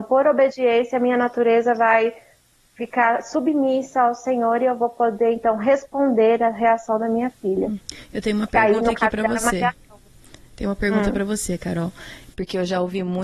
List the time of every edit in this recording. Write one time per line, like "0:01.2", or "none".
none